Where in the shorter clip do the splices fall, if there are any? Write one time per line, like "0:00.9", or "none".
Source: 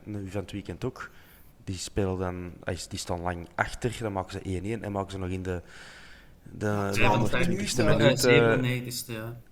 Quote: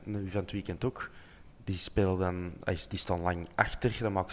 none

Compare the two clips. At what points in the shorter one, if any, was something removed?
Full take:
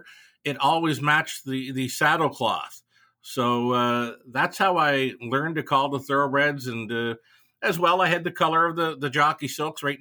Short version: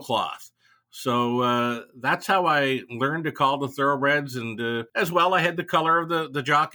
0:04.9

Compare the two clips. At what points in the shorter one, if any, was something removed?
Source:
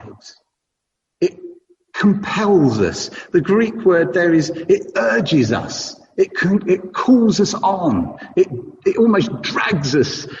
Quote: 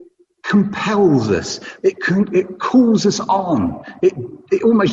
0:01.8

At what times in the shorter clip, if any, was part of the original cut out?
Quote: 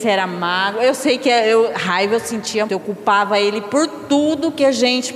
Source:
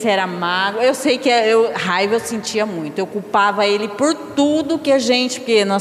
0:02.7

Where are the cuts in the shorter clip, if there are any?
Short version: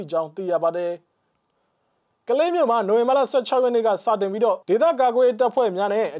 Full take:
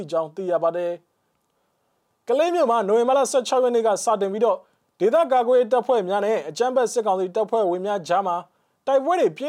0:04.6

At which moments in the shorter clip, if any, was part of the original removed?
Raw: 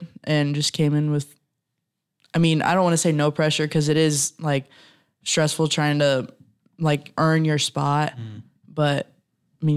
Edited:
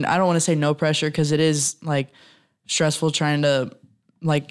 none

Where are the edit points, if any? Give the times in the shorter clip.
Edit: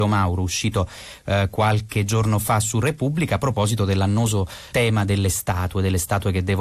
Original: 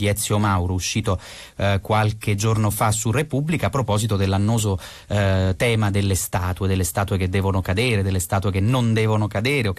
0:04.7

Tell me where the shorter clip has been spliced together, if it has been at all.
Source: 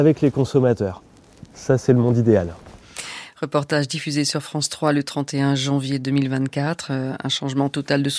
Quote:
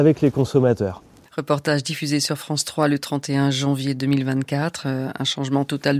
0:01.3

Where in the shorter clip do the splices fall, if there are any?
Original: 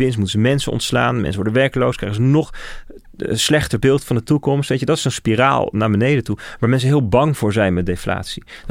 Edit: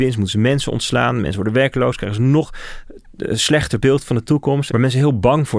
0:04.7

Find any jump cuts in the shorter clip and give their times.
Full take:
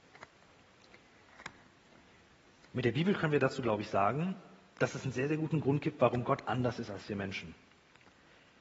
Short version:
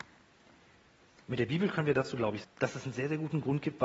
0:02.4

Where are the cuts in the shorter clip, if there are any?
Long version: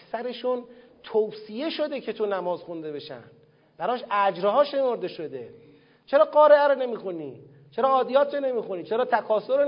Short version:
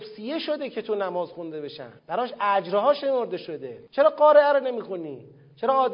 0:02.0
0:03.9

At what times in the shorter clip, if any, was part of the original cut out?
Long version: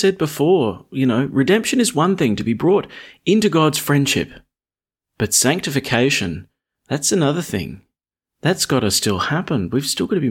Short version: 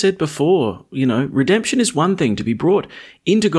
none

